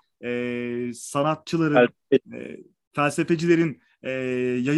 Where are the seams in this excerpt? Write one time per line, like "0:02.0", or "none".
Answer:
none